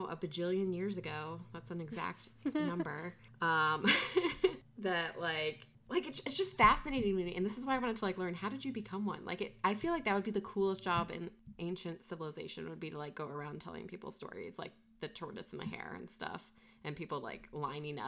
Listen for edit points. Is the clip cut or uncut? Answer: uncut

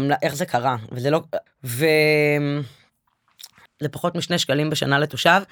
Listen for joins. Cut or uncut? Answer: cut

